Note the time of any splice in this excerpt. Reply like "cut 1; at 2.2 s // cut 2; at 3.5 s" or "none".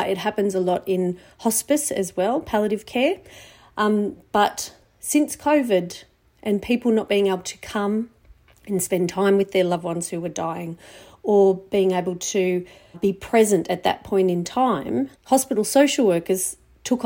cut 1; at 12.9 s // cut 2; at 15.1 s